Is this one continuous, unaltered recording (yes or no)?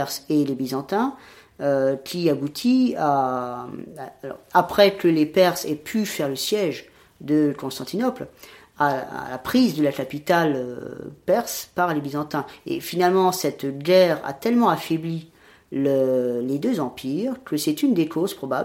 yes